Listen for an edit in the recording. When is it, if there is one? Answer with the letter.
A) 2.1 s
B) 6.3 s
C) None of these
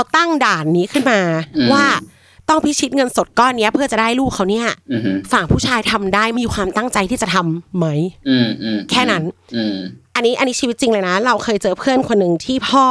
B